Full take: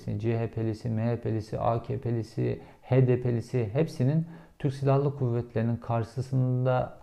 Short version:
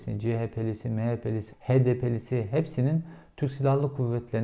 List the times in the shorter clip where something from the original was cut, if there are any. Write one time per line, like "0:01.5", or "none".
0:01.5